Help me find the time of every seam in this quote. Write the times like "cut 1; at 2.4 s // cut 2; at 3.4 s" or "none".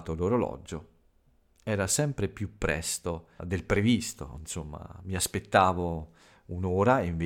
cut 1; at 3.4 s